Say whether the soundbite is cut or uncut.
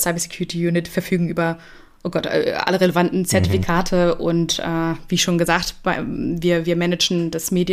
uncut